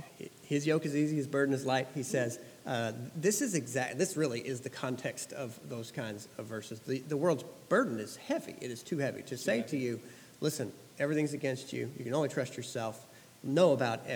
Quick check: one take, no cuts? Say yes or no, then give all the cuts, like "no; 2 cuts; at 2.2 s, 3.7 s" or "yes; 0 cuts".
yes; 0 cuts